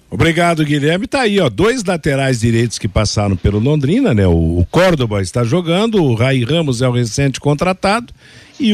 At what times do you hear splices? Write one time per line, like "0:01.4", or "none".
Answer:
none